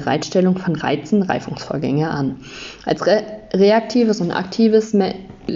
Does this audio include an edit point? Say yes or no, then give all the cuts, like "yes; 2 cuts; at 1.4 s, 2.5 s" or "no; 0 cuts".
no; 0 cuts